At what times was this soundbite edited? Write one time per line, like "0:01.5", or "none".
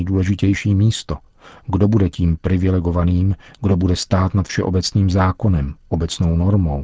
none